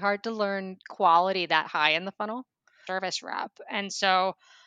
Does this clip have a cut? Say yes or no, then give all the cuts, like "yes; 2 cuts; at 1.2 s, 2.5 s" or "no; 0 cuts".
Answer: yes; 1 cut; at 2.9 s